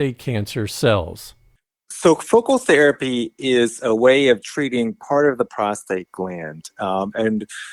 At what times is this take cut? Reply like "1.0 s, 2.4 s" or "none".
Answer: 4.4 s